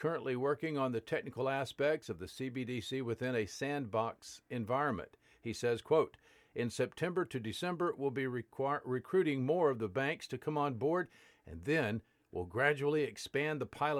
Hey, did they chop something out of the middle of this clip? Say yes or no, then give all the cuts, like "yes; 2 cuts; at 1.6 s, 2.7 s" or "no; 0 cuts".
no; 0 cuts